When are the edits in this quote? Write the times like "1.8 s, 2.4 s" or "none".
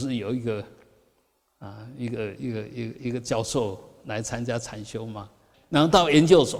5.5 s